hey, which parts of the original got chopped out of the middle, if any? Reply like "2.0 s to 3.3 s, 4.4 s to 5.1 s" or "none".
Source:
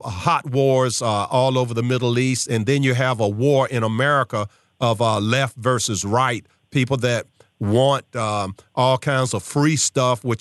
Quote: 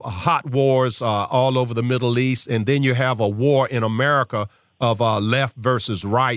none